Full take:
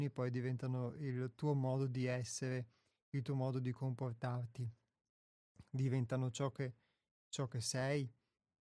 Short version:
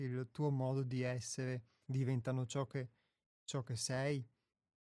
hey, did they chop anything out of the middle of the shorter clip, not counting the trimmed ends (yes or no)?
yes